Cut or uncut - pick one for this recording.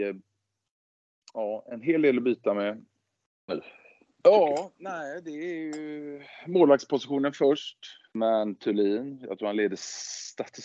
cut